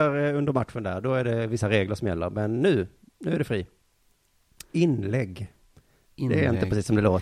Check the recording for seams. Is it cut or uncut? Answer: uncut